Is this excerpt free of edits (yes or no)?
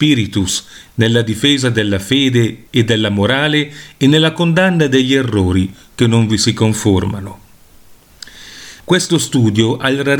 no